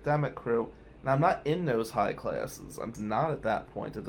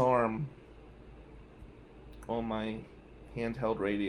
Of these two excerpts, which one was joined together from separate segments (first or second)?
first